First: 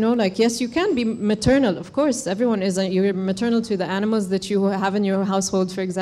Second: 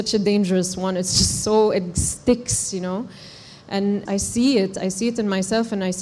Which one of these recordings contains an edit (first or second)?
second